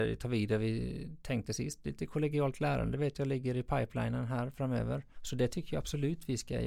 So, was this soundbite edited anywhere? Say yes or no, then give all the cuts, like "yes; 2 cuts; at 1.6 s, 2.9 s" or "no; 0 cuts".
yes; 1 cut; at 5.1 s